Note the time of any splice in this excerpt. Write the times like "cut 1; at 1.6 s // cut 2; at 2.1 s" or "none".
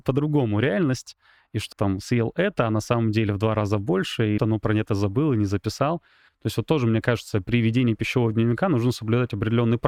cut 1; at 1.7 s // cut 2; at 4.4 s